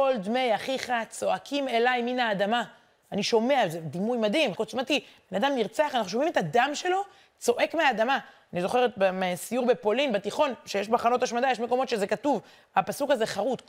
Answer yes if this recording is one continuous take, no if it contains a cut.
no